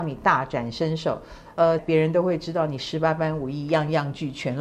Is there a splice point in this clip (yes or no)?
yes